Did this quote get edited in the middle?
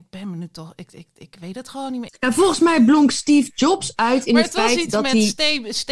yes; 1 cut; at 2.1 s

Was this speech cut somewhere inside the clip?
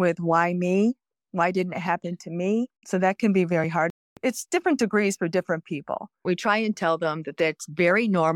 yes; 1 cut; at 2.8 s

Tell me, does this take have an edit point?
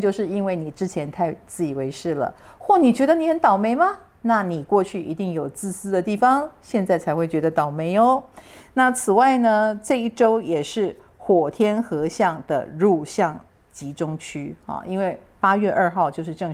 no; 0 cuts

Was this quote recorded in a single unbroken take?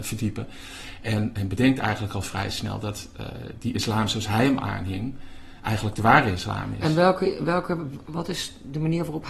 yes; 0 cuts

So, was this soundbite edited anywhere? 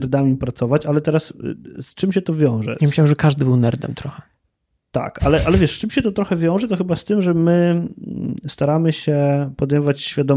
no; 0 cuts

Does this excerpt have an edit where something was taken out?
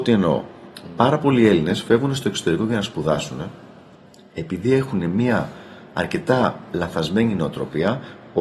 no; 0 cuts

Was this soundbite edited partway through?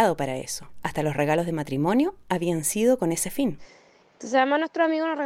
no; 0 cuts

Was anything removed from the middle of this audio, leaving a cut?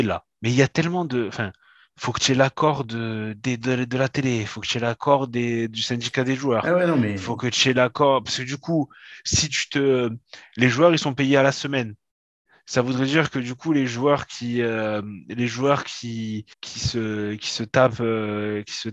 yes; 1 cut; at 16.5 s

